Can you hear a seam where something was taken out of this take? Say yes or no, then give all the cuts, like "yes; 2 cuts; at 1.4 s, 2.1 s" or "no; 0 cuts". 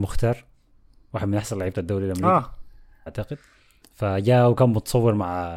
yes; 1 cut; at 3.1 s